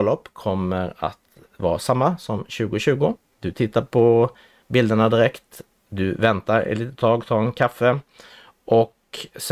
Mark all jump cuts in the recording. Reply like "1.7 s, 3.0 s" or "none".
3.3 s